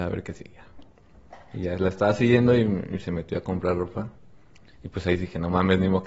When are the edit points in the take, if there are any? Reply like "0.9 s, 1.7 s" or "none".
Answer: none